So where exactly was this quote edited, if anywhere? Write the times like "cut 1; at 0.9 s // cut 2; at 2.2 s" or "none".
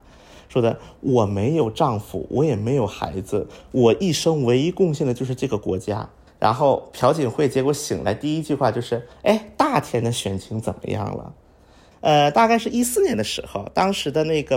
cut 1; at 6.3 s // cut 2; at 11.9 s